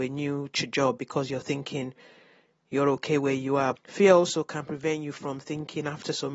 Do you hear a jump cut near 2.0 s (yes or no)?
no